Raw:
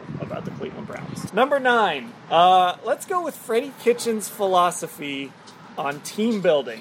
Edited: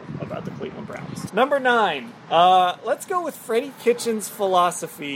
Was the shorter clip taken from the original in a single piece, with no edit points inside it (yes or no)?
yes